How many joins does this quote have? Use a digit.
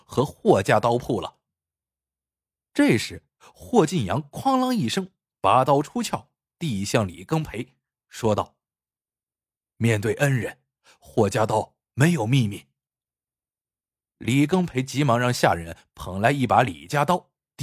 0